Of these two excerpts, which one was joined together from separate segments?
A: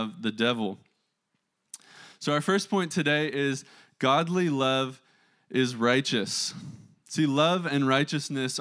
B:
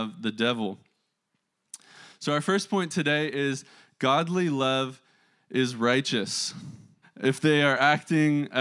B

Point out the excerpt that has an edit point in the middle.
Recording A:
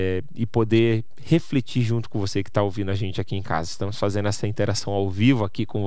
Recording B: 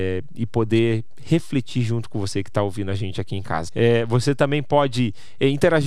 B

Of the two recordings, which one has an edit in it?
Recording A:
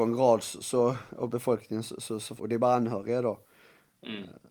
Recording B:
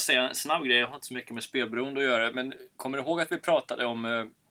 A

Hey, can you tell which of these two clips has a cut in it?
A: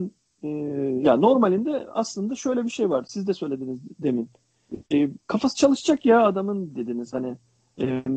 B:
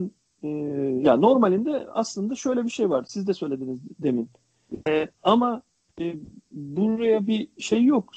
B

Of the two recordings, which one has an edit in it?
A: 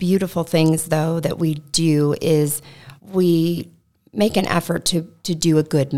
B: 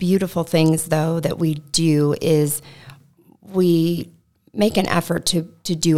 A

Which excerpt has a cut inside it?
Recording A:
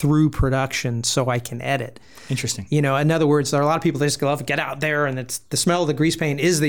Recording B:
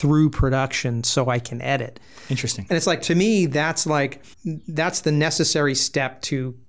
B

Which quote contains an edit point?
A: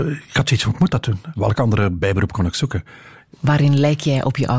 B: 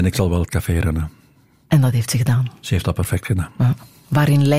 A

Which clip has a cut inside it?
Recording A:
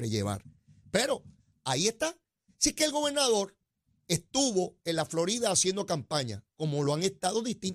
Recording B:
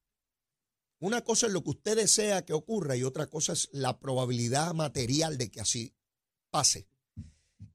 A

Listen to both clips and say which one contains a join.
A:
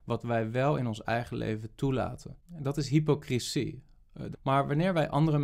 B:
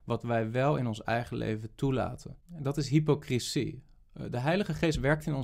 A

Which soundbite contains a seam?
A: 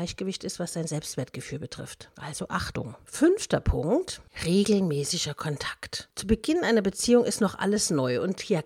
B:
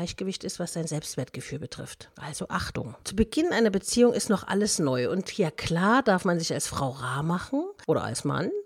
B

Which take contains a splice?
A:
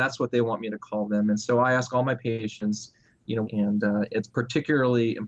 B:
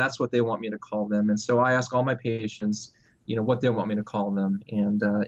A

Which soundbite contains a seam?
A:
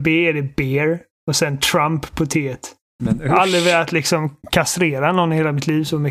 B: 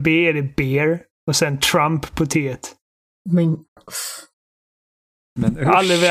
A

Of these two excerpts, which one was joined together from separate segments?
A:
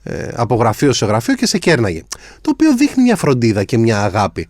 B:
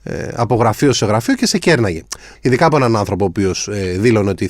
B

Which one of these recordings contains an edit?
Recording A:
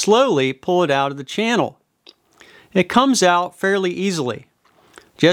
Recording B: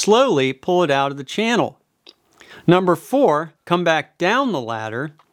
B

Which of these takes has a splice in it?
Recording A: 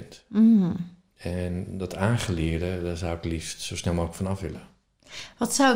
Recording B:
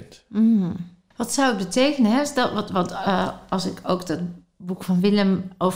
B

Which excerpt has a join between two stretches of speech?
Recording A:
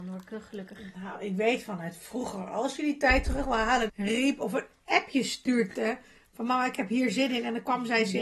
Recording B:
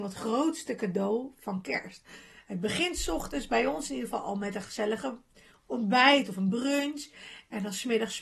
A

